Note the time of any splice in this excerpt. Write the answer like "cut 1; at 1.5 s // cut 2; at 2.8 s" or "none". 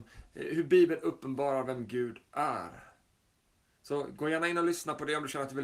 none